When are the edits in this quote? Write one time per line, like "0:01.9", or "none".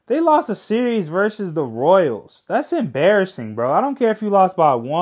none